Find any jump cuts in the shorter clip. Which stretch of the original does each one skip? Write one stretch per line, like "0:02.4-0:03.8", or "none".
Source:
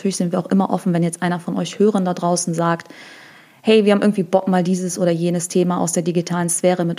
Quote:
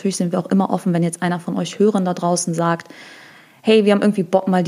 none